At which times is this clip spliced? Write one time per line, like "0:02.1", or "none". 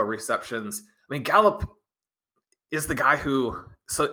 none